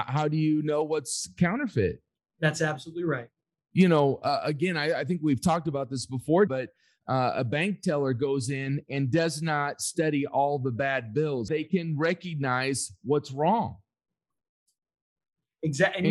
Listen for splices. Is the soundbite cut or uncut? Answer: cut